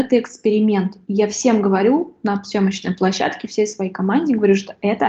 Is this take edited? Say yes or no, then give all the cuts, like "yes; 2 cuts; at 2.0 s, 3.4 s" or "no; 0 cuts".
no; 0 cuts